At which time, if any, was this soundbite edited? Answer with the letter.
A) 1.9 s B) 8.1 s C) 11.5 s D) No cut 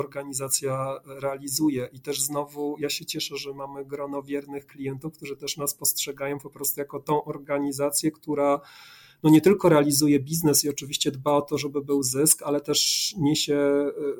D